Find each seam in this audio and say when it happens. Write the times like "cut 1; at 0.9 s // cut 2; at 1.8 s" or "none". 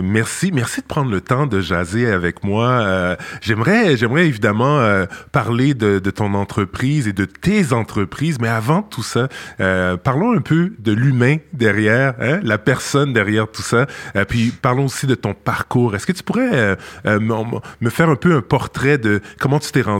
none